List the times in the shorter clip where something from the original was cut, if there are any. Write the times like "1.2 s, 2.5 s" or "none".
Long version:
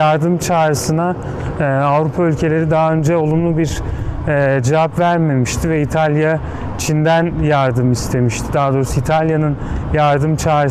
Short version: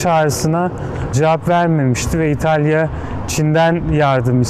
1.1 s